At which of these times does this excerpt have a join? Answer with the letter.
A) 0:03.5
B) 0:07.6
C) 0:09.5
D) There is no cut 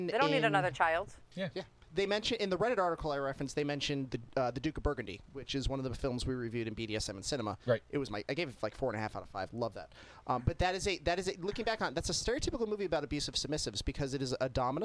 D